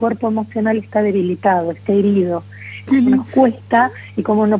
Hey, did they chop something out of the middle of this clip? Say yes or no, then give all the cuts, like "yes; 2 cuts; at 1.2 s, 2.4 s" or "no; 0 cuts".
yes; 1 cut; at 2.9 s